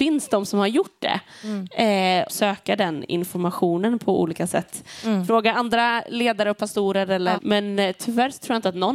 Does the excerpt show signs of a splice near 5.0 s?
no; 2 cuts; at 2.3 s, 7.4 s

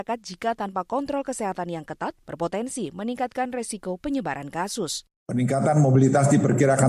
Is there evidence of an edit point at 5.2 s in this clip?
yes; 1 cut; at 5.2 s

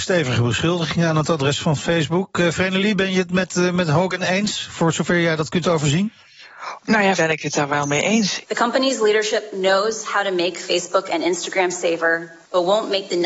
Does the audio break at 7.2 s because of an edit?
yes; 2 cuts; at 7.2 s, 8.4 s

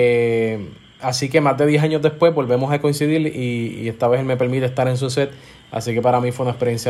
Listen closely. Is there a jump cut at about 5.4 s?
no; 0 cuts

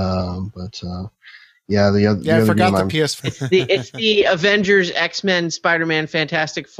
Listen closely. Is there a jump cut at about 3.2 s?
yes; 1 cut; at 3.2 s

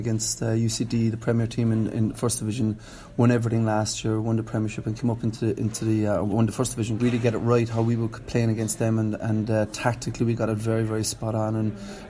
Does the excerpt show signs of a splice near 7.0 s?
yes; 1 cut; at 7.0 s

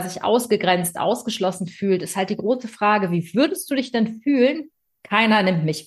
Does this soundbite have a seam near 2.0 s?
no; 1 cut; at 4.9 s

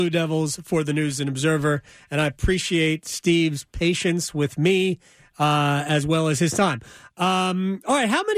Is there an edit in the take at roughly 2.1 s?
no; 0 cuts

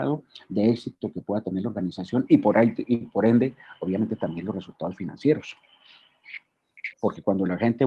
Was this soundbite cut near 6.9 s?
yes; 1 cut; at 6.9 s

